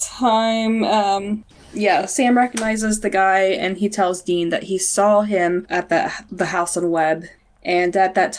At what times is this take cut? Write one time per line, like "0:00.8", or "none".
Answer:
none